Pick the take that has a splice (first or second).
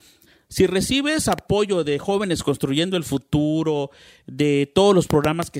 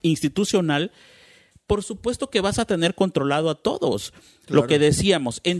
second